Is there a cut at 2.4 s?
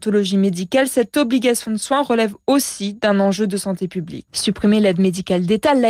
no; 1 cut; at 4.3 s

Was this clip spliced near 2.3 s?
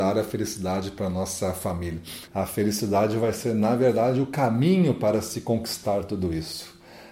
yes; 1 cut; at 2.3 s

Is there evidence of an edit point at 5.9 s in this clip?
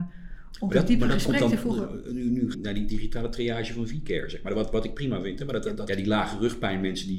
yes; 2 cuts; at 2.5 s, 5.9 s

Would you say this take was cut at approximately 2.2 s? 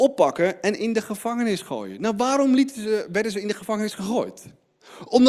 no; 0 cuts

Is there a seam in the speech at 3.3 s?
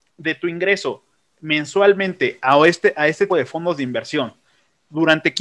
yes; 1 cut; at 3.3 s

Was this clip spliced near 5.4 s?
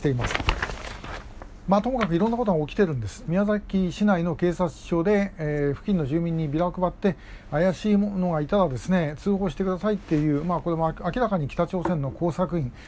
no; 1 cut; at 3.2 s

